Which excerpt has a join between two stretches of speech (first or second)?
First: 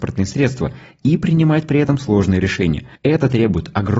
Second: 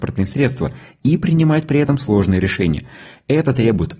first